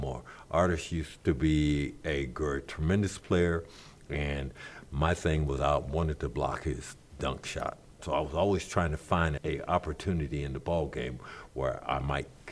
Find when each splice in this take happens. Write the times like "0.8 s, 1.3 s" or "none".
8.0 s, 9.4 s

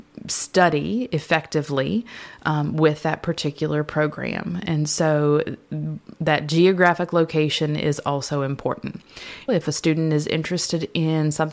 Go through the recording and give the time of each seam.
9.5 s

